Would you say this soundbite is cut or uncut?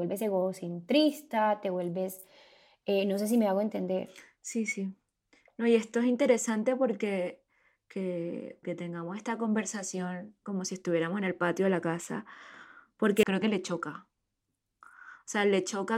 cut